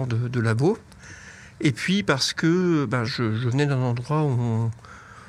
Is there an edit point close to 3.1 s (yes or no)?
yes